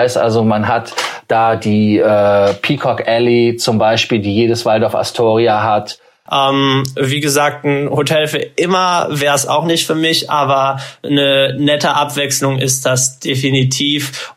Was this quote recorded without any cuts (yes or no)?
no